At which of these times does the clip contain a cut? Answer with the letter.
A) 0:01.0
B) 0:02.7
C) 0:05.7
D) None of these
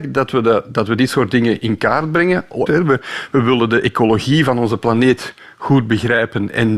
B